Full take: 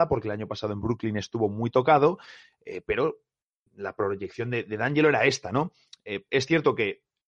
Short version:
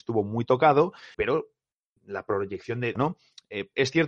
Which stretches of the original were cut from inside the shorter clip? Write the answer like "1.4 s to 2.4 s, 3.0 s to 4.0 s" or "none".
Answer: 2.4 s to 2.8 s, 4.7 s to 5.5 s